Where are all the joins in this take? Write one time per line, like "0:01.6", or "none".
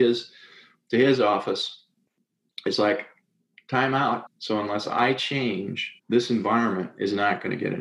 0:04.3
0:06.0